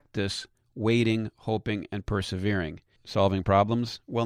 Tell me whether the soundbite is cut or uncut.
cut